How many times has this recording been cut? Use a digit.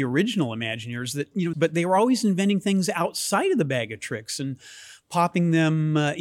1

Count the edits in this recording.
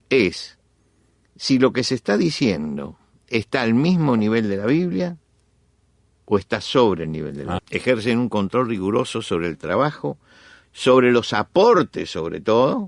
2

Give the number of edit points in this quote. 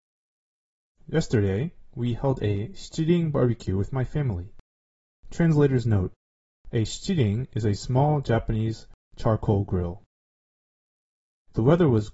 1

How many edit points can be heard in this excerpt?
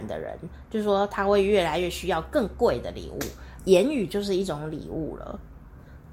1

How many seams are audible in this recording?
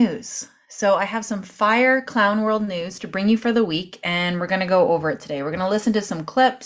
0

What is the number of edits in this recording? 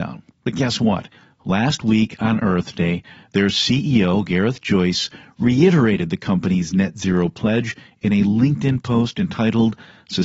0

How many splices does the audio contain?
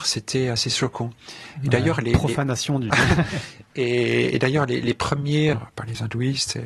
2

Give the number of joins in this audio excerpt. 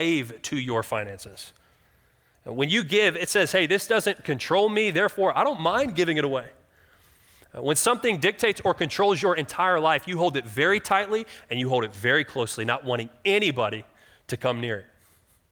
0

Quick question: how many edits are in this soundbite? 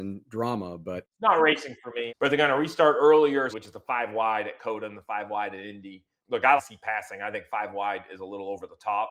3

